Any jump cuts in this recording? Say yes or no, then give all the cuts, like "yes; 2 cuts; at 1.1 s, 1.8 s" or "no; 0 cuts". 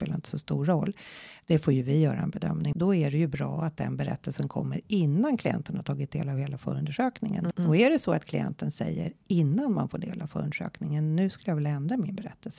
yes; 2 cuts; at 2.7 s, 7.5 s